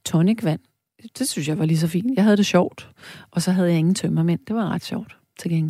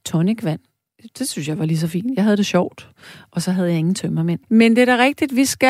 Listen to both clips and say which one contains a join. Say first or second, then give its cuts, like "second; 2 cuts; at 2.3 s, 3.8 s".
second; 1 cut; at 4.4 s